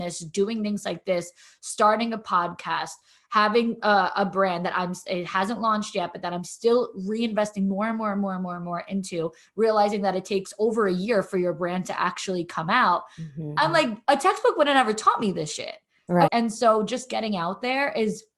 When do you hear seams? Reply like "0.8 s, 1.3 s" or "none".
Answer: 16.3 s